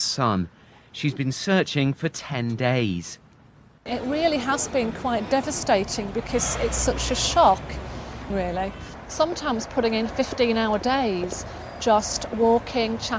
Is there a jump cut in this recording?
yes; 1 cut; at 8.3 s

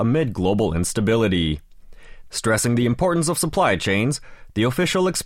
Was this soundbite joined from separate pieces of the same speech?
yes; 1 cut; at 2.3 s

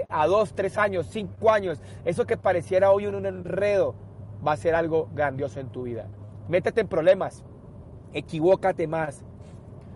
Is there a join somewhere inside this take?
no; 0 cuts

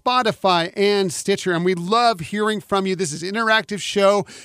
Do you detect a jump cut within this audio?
no; 0 cuts

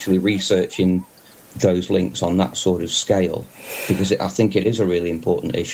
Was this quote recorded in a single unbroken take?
yes; 0 cuts

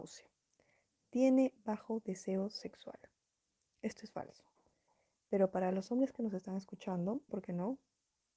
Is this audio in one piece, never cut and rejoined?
no; 1 cut; at 7.3 s

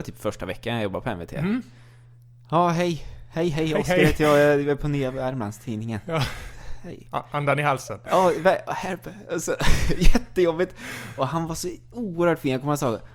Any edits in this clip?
no; 0 cuts

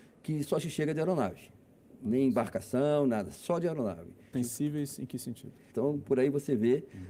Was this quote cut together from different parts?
yes; 2 cuts; at 4.3 s, 5.7 s

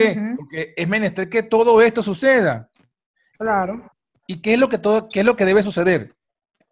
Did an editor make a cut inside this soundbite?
yes; 1 cut; at 4.2 s

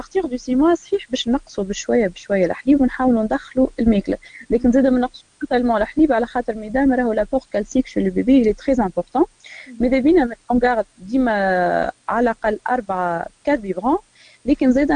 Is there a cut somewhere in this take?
no; 0 cuts

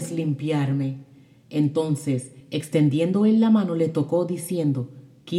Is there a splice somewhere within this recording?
no; 0 cuts

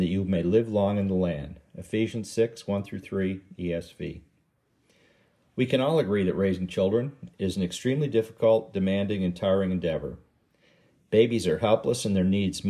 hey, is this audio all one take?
yes; 0 cuts

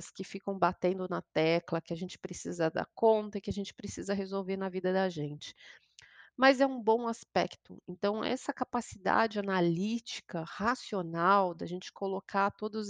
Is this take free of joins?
yes; 0 cuts

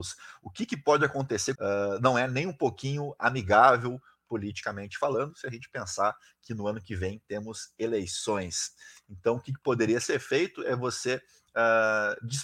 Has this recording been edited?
yes; 1 cut; at 1.5 s

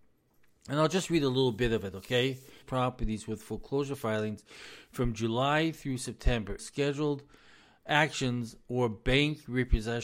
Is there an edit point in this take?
yes; 2 cuts; at 2.6 s, 6.6 s

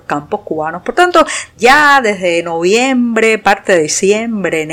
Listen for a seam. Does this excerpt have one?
yes; 1 cut; at 1.6 s

